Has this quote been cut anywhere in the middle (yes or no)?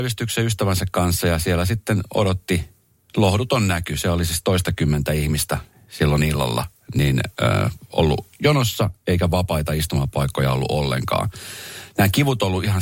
no